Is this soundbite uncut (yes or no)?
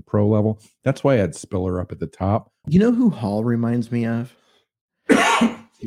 no